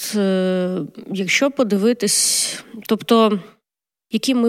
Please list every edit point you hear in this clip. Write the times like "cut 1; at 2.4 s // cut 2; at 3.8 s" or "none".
none